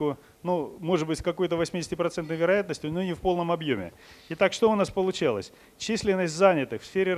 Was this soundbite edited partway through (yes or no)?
no